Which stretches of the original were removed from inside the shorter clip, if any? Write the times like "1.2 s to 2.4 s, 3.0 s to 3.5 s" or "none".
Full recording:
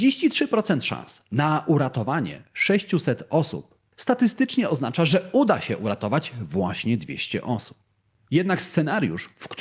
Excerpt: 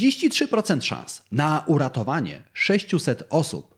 none